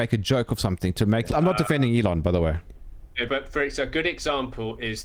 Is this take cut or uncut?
cut